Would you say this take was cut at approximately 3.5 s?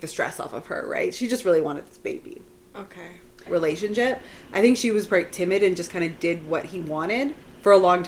yes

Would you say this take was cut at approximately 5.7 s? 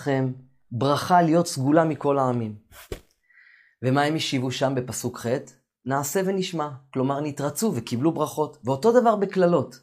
no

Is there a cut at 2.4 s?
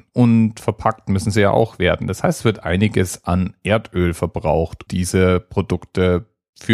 no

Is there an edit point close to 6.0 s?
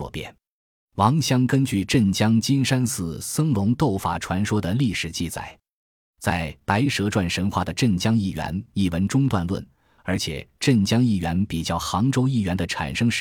no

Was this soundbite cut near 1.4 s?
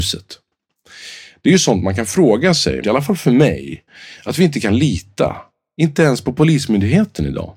no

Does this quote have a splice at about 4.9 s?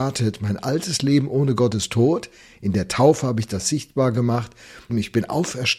yes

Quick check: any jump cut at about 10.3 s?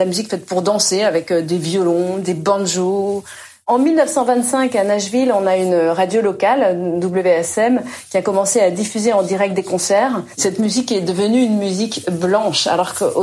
yes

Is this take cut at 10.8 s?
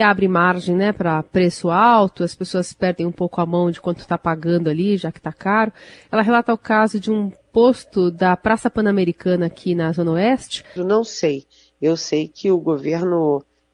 yes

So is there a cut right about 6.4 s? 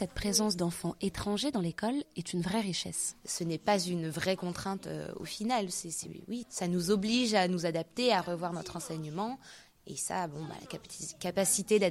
yes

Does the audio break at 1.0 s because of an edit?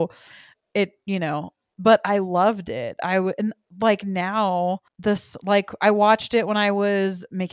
no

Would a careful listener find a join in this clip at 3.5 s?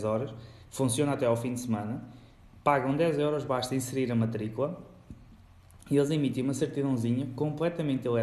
no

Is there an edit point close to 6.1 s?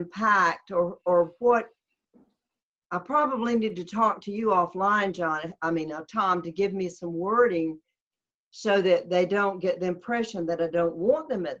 no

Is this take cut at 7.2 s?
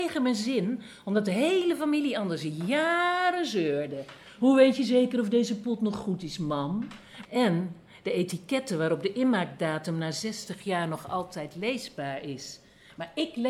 yes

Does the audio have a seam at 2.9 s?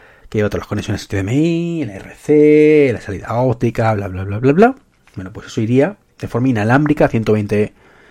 no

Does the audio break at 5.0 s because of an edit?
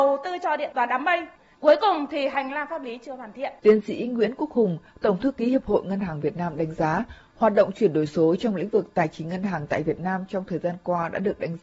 no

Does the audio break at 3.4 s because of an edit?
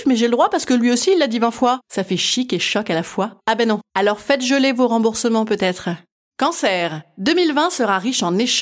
yes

